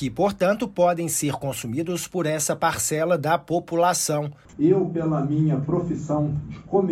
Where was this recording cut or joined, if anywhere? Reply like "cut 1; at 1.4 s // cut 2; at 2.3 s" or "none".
cut 1; at 4.5 s